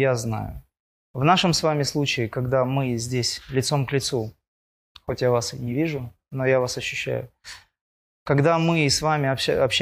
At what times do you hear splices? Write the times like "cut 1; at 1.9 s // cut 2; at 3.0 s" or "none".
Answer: cut 1; at 1.0 s